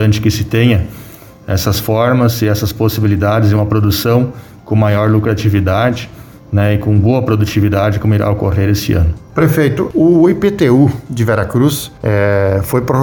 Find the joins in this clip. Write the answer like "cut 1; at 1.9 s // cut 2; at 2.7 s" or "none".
none